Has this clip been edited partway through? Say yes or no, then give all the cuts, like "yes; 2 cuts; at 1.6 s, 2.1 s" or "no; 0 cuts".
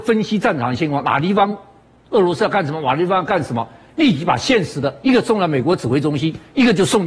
no; 0 cuts